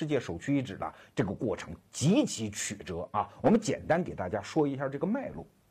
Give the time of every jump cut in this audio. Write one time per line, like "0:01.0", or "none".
0:01.1